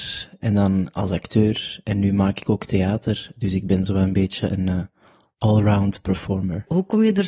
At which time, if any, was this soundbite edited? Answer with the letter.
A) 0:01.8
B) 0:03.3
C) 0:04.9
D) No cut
D